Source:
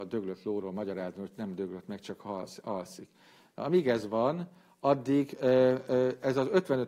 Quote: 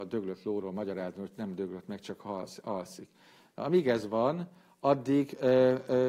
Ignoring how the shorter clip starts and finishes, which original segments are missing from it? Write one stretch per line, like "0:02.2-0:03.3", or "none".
none